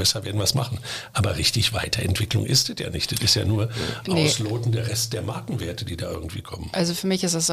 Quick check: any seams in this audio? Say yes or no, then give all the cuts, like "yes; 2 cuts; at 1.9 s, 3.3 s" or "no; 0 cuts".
no; 0 cuts